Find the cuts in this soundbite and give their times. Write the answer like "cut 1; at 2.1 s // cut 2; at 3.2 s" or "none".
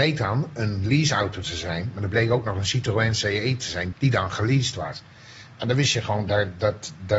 cut 1; at 3.9 s